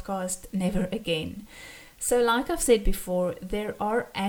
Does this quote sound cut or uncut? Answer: uncut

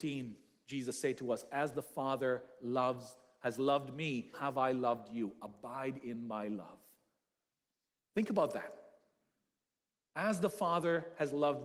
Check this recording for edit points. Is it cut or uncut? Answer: cut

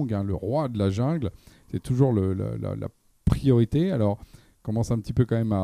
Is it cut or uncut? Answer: uncut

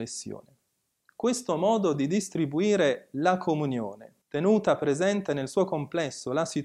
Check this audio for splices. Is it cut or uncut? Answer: cut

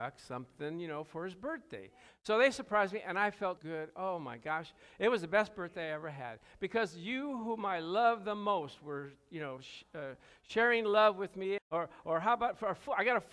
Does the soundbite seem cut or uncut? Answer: cut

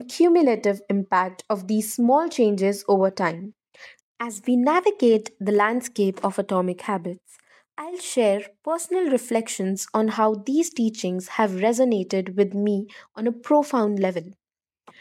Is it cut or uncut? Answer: cut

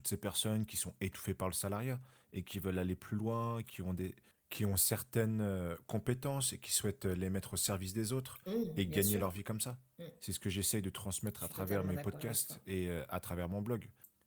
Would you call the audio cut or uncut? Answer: uncut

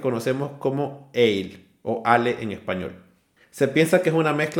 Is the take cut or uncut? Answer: cut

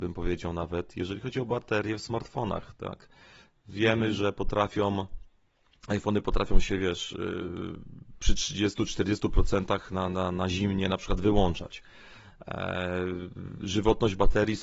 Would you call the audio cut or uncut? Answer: uncut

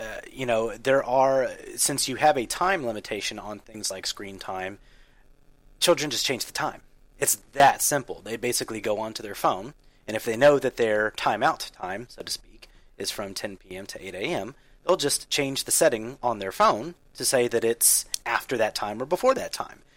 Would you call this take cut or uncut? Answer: uncut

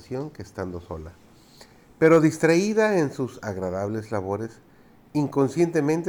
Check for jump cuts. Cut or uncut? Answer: uncut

